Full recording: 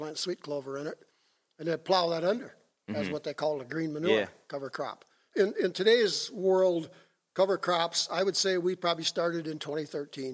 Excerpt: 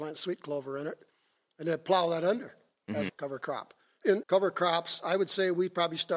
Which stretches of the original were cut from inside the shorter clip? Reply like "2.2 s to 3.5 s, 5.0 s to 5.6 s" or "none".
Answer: 3.1 s to 4.4 s, 5.5 s to 7.3 s

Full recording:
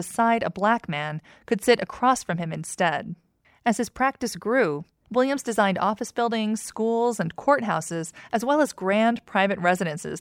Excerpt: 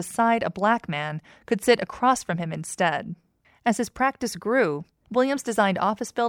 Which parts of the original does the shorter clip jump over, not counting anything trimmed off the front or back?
none

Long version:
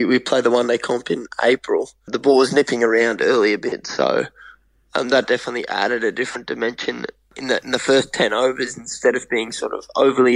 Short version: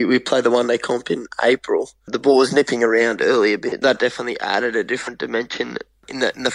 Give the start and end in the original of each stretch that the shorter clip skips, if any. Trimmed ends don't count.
3.8 s to 5.1 s

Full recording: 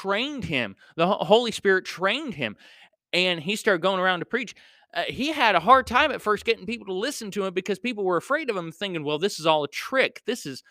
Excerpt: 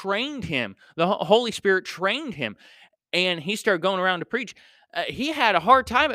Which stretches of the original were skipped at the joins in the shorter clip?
none

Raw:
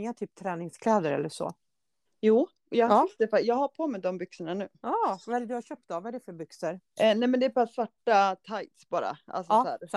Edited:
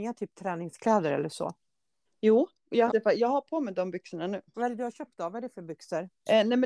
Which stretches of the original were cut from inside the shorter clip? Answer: 2.9 s to 3.1 s, 4.8 s to 5.2 s

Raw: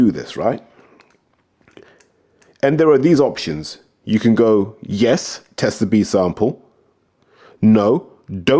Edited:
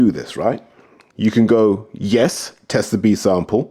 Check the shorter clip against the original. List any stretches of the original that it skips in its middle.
1.1 s to 4.0 s

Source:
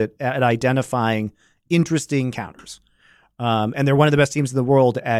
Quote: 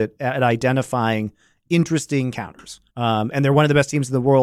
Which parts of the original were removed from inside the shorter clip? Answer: 2.9 s to 3.3 s

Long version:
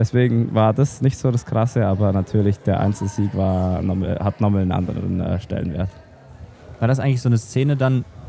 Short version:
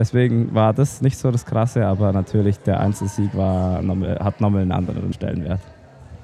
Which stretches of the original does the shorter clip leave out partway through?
5.1 s to 5.4 s

